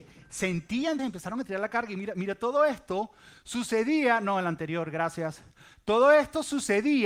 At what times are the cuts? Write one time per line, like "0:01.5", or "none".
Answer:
0:01.0